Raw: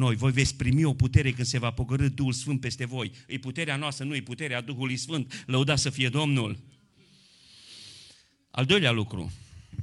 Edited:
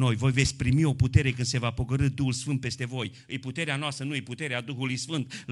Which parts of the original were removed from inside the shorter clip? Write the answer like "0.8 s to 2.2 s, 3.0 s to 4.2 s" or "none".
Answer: none